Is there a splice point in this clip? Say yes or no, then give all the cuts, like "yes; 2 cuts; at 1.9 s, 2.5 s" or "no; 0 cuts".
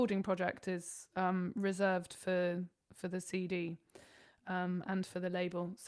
no; 0 cuts